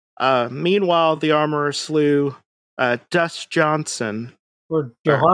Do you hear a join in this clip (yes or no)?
no